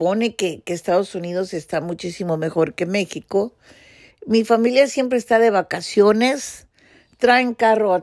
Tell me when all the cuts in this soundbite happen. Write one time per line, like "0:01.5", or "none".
0:04.1